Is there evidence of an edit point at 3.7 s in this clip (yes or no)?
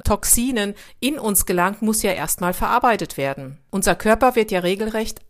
no